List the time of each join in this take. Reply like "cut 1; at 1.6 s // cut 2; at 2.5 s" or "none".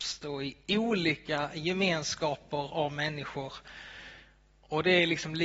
none